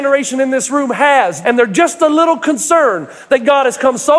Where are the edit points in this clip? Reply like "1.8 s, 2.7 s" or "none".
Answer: 1.4 s